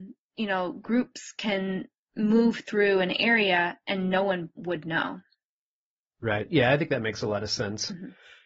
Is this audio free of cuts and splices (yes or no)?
yes